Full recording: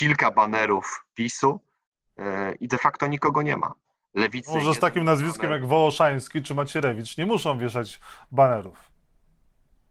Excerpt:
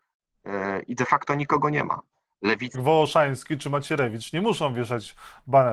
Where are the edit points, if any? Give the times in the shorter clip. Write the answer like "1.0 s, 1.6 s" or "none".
2.7 s